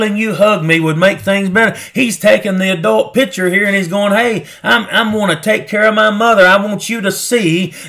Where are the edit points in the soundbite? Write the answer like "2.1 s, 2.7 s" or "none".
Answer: 1.9 s